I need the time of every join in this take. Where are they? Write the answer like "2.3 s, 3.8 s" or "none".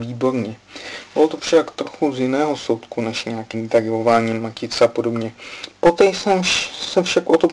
3.5 s, 5.7 s